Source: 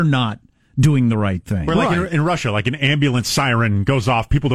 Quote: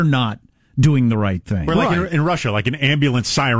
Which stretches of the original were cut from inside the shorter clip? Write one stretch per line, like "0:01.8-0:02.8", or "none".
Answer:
none